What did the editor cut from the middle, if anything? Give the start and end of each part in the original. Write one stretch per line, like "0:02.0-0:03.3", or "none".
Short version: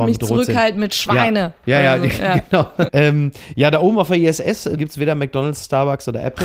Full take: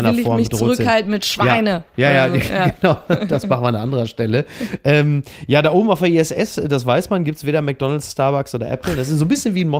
0:03.2-0:04.8
0:06.7-0:07.2